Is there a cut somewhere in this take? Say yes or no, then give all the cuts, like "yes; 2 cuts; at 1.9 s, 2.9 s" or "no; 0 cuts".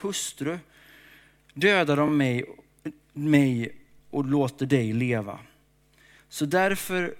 no; 0 cuts